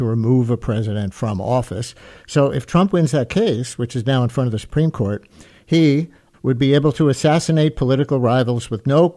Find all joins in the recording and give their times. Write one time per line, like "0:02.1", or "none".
0:06.3